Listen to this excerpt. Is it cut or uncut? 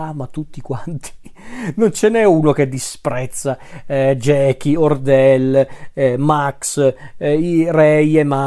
uncut